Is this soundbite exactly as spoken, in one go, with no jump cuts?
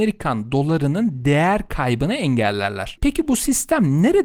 no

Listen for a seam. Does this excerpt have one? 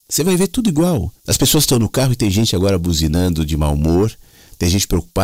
yes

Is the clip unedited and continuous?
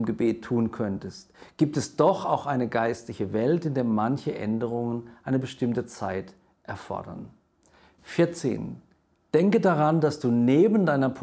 yes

